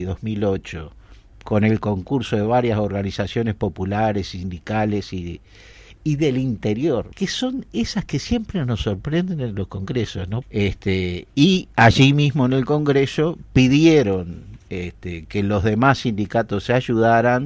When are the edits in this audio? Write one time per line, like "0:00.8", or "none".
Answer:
0:07.1
0:10.4